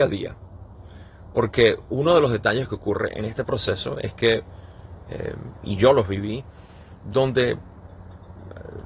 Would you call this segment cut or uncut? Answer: uncut